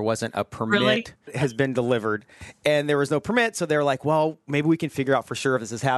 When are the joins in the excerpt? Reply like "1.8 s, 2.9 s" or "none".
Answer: 1.3 s